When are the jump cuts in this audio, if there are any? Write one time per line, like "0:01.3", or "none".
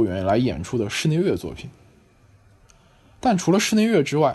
none